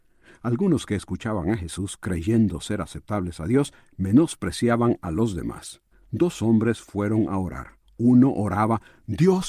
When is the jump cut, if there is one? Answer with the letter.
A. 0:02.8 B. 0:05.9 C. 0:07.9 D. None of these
B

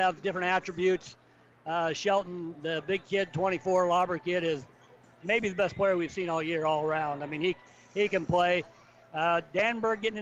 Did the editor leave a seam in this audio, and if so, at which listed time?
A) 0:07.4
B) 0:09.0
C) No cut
B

